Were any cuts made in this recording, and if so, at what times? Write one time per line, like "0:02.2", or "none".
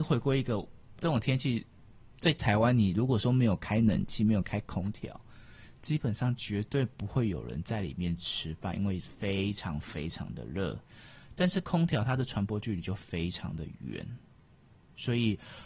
0:01.0